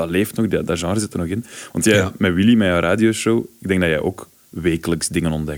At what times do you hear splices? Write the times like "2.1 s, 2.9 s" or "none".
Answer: none

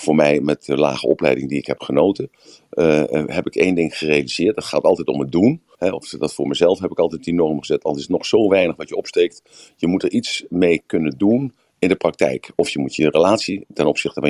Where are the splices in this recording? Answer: 5.7 s, 12.5 s

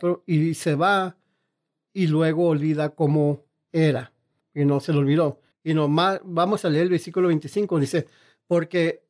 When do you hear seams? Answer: 4.4 s, 5.5 s

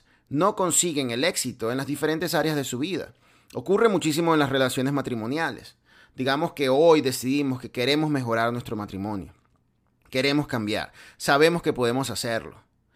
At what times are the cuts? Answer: none

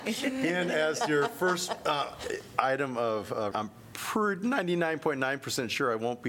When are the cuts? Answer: 3.5 s

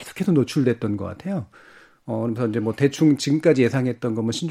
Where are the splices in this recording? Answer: none

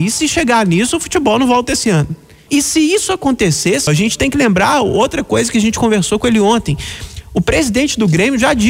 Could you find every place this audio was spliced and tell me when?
2.5 s, 3.9 s

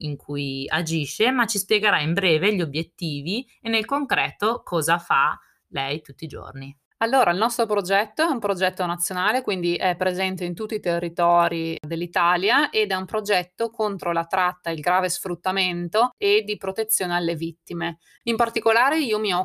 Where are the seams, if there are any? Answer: 18.2 s

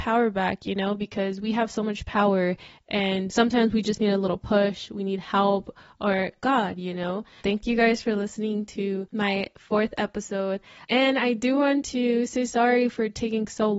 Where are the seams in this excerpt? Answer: 7.4 s

